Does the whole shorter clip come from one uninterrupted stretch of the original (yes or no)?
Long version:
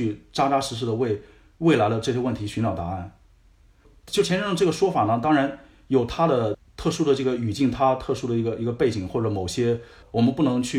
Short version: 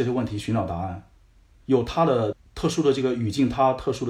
no